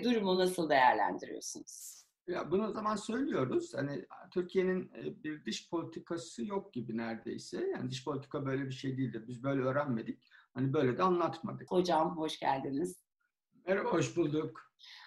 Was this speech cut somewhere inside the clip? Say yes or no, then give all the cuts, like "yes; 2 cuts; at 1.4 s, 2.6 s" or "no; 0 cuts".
yes; 2 cuts; at 2.7 s, 11.7 s